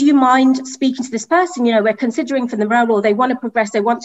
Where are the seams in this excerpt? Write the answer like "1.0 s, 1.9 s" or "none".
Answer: none